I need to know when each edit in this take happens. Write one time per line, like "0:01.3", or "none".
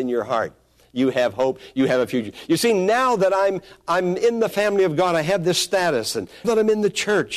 0:06.4